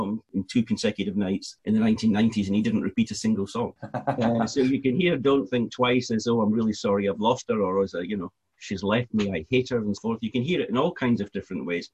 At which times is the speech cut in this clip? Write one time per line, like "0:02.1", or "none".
0:03.8
0:10.0